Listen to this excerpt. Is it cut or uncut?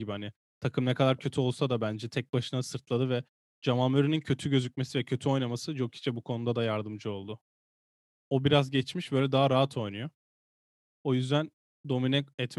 cut